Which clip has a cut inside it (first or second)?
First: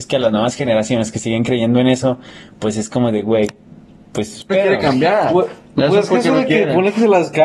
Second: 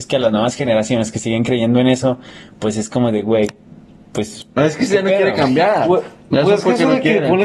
first